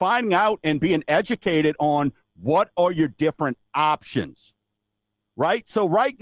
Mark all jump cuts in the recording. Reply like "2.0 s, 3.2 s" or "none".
none

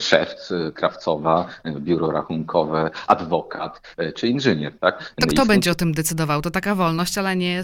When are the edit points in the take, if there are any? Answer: 5.2 s

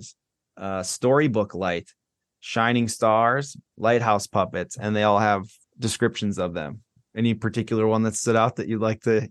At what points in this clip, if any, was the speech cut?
3.7 s, 5.6 s

